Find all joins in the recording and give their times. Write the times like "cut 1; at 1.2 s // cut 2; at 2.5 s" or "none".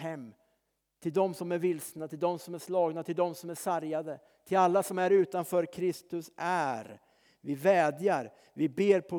none